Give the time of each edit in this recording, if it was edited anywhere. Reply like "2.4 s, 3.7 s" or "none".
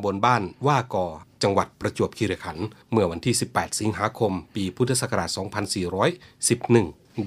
2.8 s